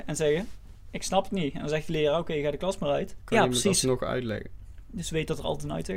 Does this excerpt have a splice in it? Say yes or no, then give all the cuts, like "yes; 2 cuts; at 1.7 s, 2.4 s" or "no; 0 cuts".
yes; 2 cuts; at 3.2 s, 4.9 s